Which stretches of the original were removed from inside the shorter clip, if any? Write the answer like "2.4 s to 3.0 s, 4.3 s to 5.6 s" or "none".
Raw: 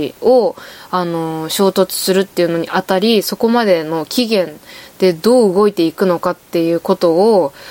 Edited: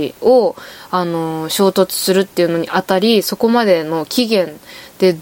none

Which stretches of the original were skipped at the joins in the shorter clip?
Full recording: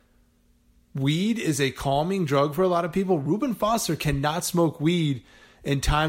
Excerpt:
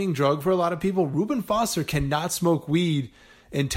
none

